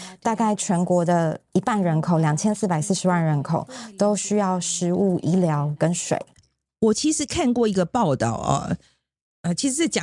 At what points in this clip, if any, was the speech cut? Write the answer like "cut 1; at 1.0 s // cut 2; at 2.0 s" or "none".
none